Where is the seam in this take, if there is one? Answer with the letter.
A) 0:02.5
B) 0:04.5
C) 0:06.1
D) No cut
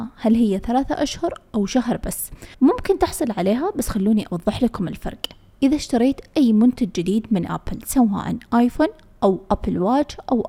A